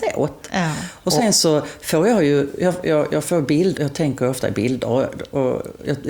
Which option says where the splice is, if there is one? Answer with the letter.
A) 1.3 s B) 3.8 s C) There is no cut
B